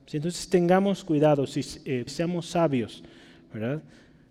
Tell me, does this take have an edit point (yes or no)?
yes